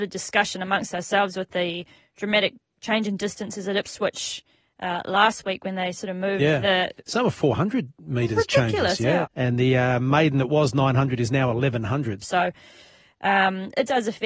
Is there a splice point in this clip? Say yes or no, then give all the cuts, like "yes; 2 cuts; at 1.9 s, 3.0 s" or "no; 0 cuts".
yes; 2 cuts; at 9.2 s, 12.2 s